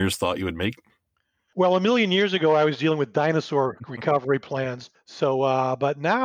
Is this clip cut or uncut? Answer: uncut